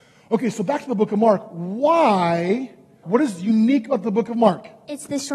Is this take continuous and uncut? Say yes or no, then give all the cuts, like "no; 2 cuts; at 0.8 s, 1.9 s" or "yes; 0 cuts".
no; 1 cut; at 3.0 s